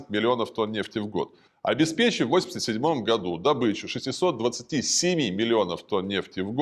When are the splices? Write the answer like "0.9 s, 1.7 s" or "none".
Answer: 1.5 s